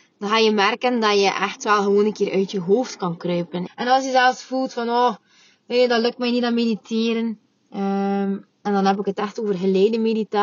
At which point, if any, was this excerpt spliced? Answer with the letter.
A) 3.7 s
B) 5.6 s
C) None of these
A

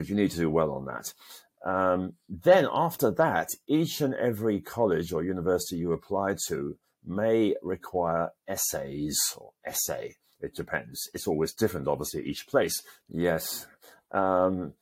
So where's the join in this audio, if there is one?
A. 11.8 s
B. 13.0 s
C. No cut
B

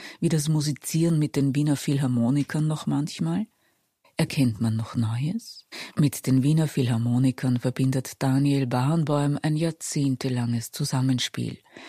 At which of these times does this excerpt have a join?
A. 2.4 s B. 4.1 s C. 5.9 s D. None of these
D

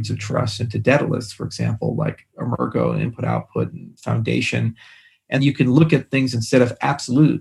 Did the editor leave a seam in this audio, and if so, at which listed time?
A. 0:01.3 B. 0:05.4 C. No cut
B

